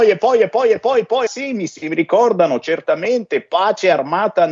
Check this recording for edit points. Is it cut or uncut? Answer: cut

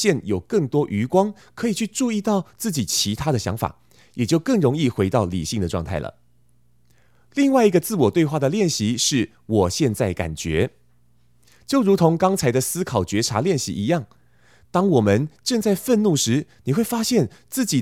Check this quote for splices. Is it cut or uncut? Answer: uncut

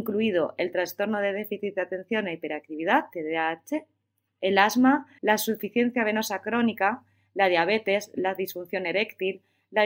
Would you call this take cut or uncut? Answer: cut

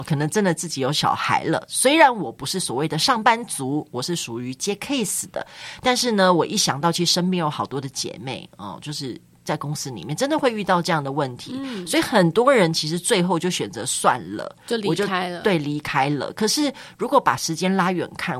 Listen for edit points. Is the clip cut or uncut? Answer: uncut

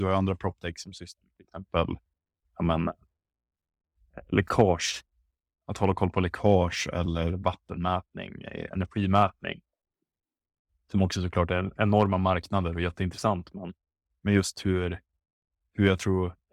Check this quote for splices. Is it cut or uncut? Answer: uncut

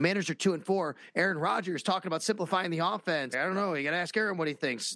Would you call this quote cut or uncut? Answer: cut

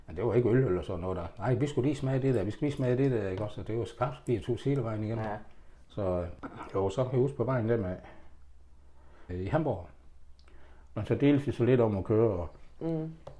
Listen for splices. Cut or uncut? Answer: cut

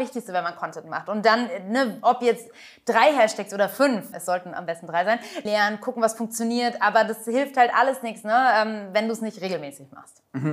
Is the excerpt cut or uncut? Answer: cut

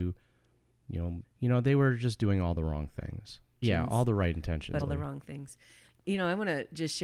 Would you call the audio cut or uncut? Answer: cut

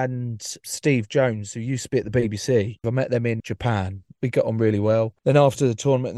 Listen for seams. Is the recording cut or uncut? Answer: cut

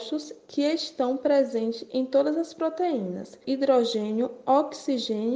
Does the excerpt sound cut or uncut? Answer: cut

